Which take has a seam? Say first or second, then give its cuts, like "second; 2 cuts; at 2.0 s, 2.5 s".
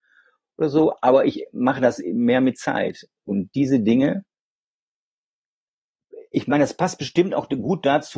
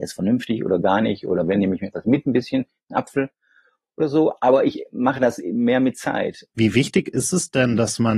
second; 1 cut; at 6.5 s